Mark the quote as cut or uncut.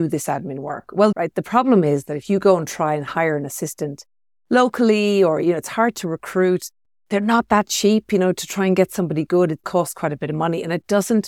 cut